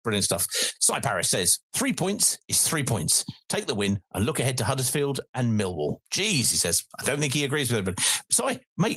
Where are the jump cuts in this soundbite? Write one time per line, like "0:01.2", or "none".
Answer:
none